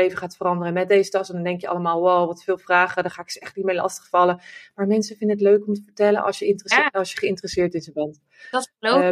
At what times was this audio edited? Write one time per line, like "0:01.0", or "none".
none